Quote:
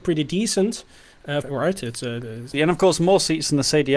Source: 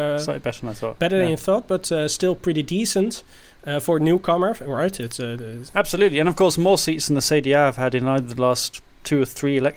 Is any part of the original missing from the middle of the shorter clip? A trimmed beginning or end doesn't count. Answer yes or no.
yes